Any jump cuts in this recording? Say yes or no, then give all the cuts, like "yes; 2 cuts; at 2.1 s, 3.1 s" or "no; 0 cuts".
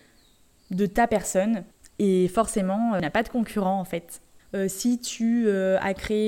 yes; 1 cut; at 4.4 s